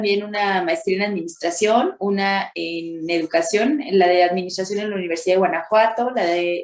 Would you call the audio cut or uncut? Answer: uncut